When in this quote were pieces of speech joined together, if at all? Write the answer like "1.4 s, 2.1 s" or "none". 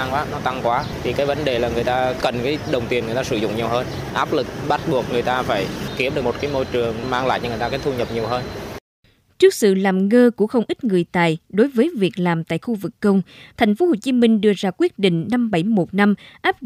13.5 s